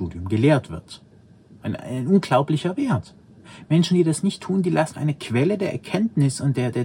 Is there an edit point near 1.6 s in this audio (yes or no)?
no